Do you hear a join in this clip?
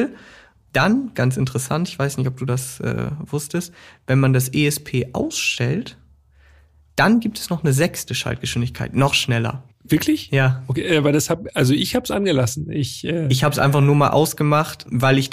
no; 0 cuts

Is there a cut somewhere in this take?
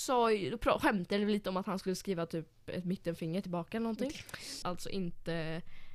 yes; 1 cut; at 4.6 s

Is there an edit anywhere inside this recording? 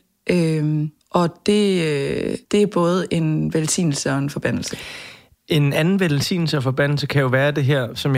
yes; 2 cuts; at 1.0 s, 2.4 s

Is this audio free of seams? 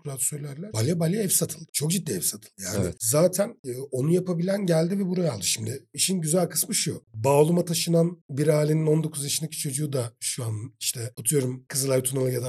yes; 0 cuts

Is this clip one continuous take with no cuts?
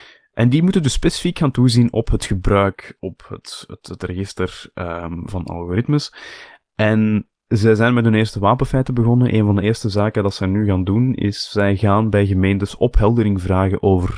no; 1 cut; at 7.4 s

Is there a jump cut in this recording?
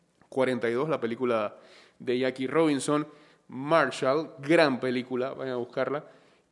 yes; 1 cut; at 5.3 s

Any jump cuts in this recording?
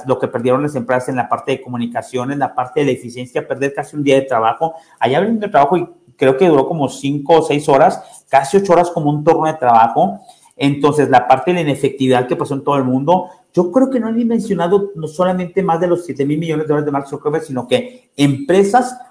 no; 0 cuts

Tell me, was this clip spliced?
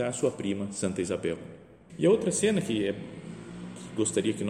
yes; 1 cut; at 1.9 s

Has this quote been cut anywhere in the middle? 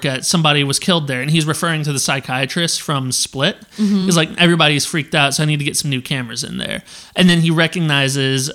no; 0 cuts

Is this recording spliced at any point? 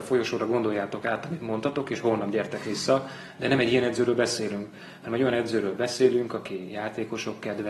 no; 0 cuts

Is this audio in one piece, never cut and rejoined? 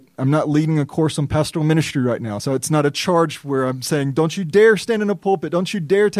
yes; 0 cuts

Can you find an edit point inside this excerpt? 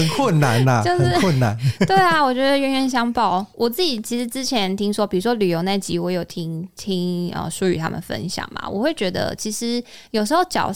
no; 0 cuts

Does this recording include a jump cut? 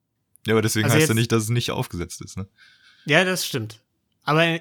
no; 0 cuts

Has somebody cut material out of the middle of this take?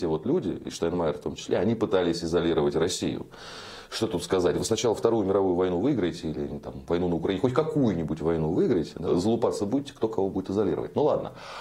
yes; 1 cut; at 9.1 s

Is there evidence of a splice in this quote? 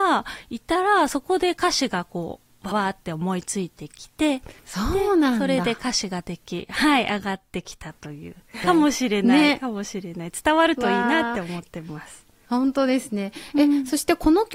yes; 3 cuts; at 2.7 s, 4.6 s, 8.6 s

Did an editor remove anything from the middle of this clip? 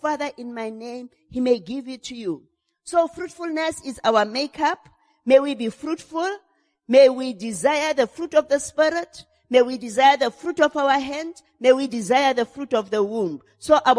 no; 0 cuts

